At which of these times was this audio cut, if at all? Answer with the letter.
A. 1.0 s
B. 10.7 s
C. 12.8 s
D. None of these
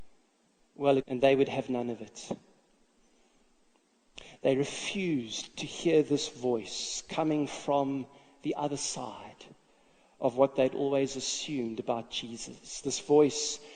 A